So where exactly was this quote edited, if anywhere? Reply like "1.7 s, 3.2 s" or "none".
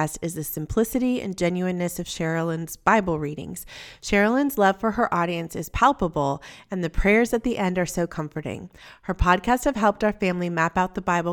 none